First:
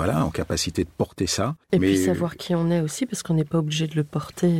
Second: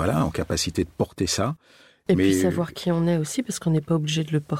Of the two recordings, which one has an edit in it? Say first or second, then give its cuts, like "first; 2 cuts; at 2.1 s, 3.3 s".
first; 1 cut; at 1.6 s